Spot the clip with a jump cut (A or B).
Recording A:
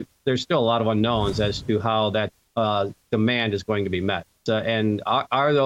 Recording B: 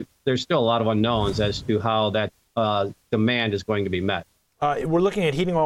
A